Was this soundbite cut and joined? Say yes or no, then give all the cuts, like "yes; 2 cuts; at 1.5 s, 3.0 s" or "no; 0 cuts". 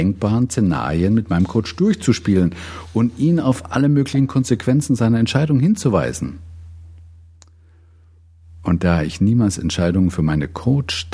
no; 0 cuts